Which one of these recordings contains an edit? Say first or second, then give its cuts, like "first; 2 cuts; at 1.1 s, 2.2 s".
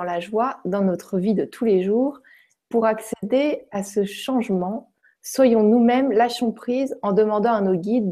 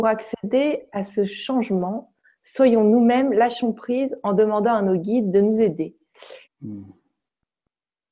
second; 1 cut; at 6.4 s